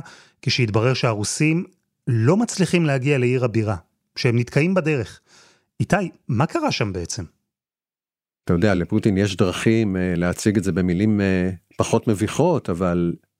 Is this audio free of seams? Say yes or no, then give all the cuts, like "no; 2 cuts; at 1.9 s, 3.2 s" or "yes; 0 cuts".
yes; 0 cuts